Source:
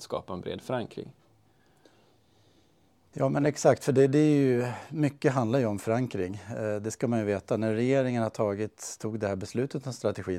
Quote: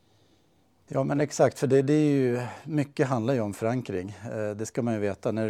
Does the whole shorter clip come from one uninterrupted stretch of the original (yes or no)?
yes